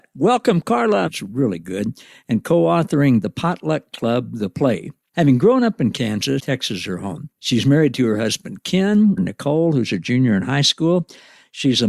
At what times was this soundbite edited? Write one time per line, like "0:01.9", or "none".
0:01.1
0:06.4
0:09.2